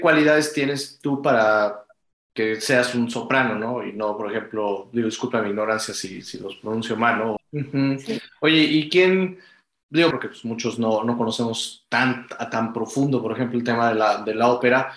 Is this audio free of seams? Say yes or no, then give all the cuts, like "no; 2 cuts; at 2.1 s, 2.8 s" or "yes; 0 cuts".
no; 2 cuts; at 7.4 s, 10.1 s